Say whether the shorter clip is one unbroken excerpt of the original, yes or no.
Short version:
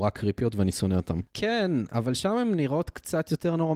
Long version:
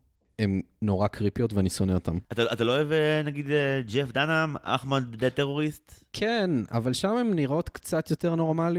no